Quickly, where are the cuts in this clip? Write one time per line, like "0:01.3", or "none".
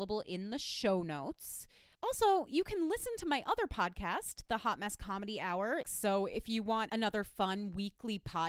0:01.9
0:05.8